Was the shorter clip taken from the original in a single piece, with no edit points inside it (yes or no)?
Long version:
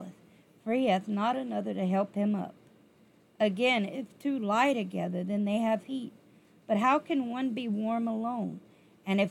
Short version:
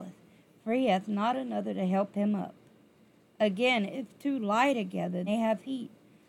no